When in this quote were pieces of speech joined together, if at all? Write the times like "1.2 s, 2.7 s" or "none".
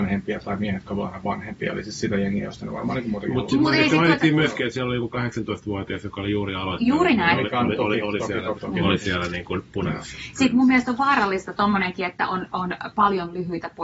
8.6 s